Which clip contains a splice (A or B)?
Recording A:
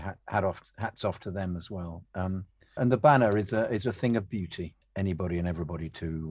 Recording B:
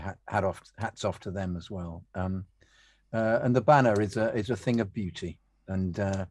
A